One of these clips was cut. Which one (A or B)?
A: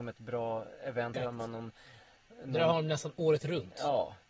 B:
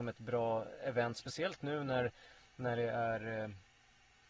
A